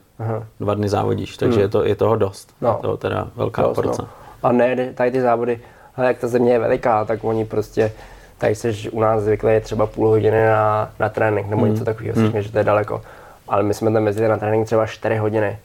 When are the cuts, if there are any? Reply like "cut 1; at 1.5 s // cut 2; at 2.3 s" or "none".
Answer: none